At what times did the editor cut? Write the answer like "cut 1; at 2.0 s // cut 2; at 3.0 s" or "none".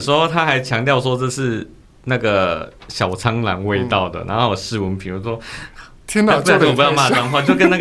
none